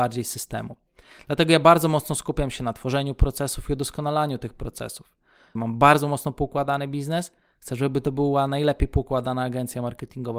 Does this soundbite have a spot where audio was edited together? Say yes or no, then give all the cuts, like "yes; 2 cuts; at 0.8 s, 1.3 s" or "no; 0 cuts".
yes; 1 cut; at 5.6 s